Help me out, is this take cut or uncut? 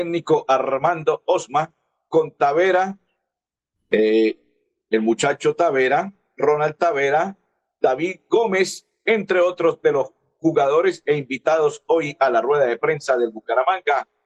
uncut